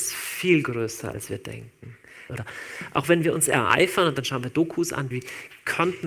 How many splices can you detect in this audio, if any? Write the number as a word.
two